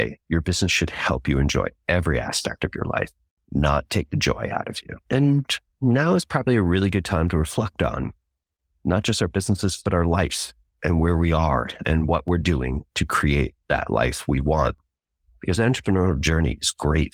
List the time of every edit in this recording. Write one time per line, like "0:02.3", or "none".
0:05.0